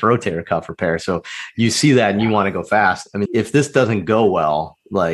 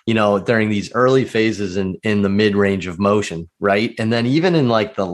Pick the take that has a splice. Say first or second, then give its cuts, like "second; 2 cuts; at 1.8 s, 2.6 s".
first; 1 cut; at 3.3 s